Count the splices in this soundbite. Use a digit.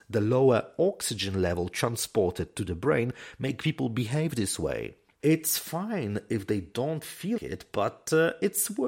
2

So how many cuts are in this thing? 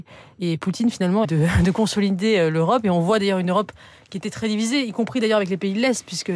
1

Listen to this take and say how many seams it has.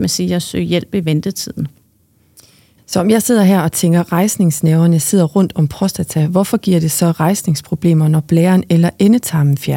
1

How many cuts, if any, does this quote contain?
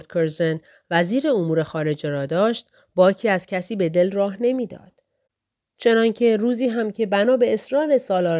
0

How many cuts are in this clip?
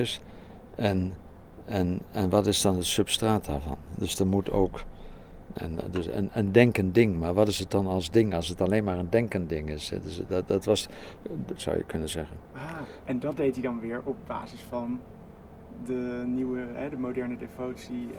3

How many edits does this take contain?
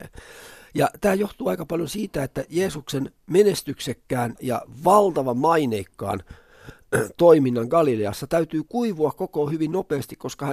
1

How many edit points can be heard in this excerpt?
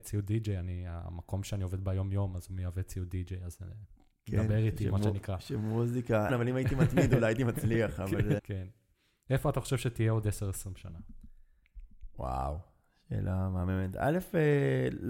2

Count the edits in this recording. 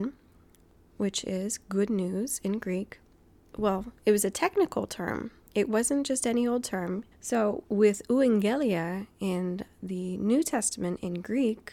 2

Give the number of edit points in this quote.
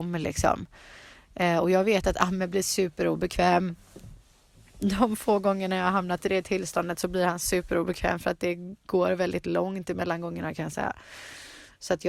0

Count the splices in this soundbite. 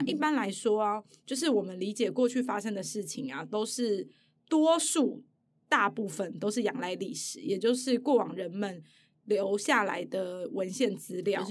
0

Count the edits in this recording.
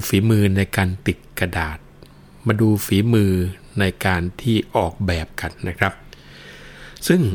1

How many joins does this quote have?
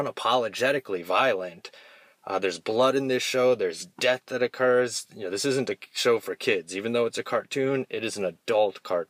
0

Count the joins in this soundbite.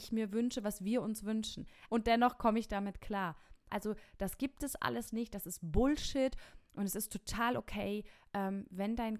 2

